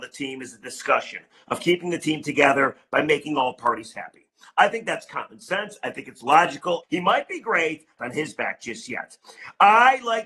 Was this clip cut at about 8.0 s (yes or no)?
yes